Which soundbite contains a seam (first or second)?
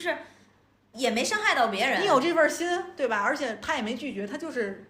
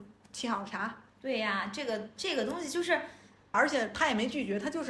second